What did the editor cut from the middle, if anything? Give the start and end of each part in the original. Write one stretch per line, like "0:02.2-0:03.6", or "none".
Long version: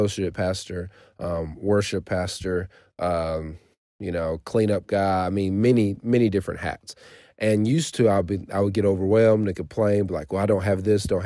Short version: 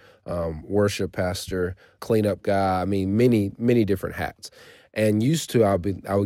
0:02.9-0:04.4